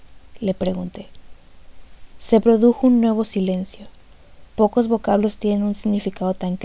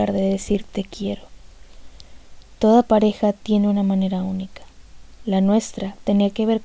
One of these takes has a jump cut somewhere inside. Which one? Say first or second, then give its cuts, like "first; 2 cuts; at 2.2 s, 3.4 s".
first; 2 cuts; at 2.1 s, 4.5 s